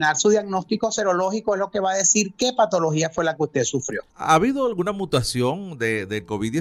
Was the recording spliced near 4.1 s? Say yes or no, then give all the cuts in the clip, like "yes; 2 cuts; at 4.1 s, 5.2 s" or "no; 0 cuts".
yes; 1 cut; at 4.1 s